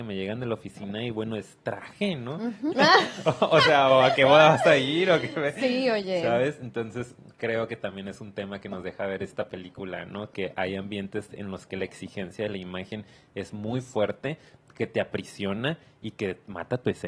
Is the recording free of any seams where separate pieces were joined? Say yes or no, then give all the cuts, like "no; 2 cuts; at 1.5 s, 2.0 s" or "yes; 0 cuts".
no; 1 cut; at 2.7 s